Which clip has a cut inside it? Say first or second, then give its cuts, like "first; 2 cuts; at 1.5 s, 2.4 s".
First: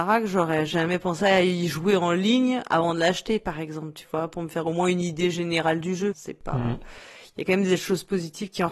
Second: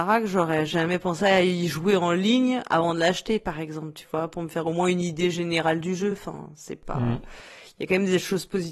first; 1 cut; at 6.1 s